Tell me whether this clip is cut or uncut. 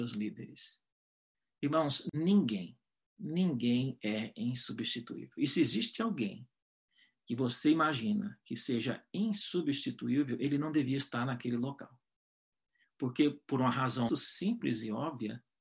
cut